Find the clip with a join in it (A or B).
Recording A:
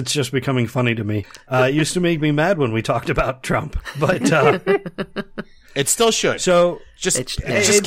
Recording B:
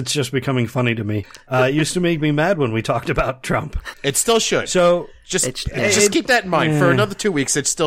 B